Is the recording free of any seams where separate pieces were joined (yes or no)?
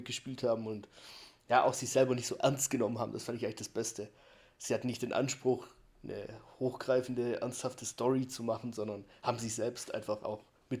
yes